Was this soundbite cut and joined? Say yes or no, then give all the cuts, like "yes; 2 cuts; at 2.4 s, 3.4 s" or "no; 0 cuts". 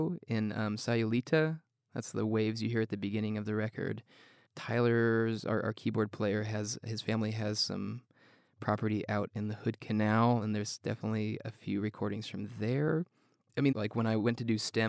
yes; 1 cut; at 13.7 s